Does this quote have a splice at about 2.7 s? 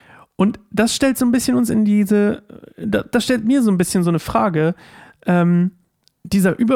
no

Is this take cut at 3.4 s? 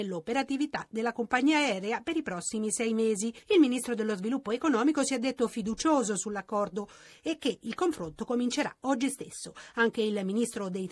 yes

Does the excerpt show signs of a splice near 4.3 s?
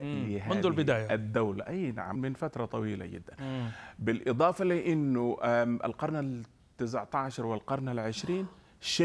no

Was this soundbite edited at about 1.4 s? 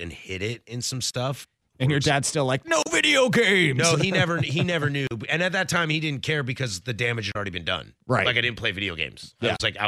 yes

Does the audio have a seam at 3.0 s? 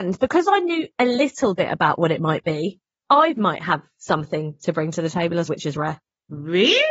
no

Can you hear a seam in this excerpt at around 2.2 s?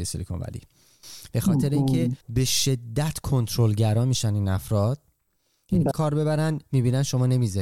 yes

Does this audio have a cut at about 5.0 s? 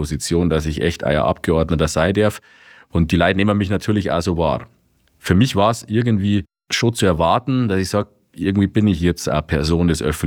no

